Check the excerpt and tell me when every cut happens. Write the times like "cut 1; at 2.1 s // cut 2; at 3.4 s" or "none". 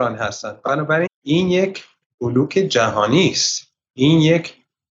cut 1; at 1.1 s